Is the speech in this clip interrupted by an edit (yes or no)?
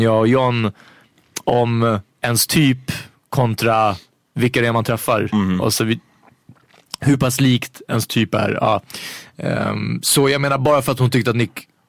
yes